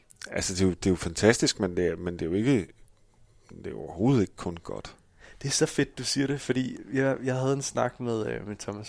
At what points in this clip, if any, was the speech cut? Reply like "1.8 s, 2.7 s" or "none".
none